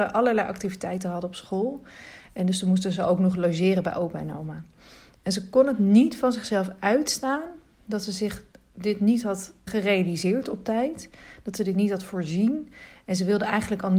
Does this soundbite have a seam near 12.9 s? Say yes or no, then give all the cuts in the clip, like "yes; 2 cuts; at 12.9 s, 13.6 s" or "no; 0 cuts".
no; 1 cut; at 9.7 s